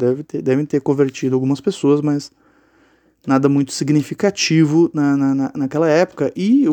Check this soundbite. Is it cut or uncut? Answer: uncut